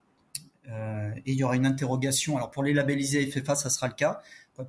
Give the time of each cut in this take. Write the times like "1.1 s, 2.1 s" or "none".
none

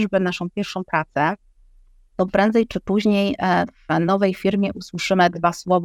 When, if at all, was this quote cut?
none

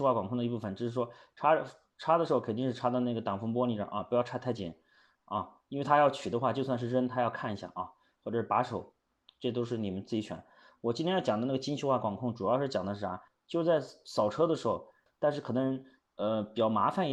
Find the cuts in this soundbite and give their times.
13.3 s, 15.1 s

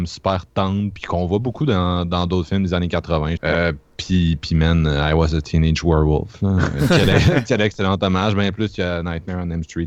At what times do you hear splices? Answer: 3.4 s

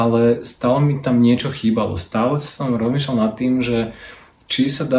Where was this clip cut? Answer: none

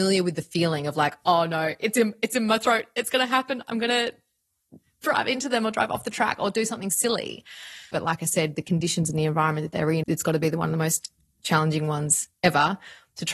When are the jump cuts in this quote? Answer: 7.9 s, 10.0 s

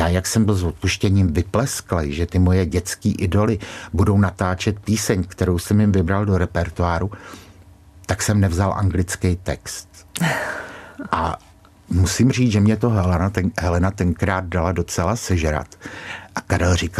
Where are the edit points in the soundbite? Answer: none

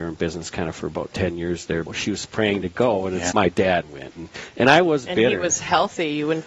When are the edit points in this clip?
1.9 s, 3.3 s

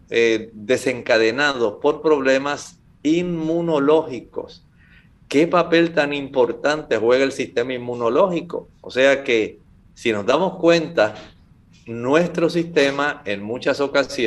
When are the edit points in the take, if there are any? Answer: none

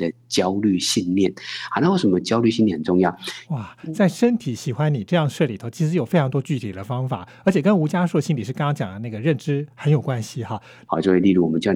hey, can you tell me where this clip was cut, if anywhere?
3.4 s, 10.8 s

